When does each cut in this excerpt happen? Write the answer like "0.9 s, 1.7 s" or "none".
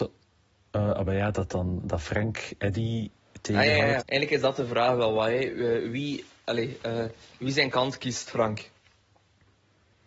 4.0 s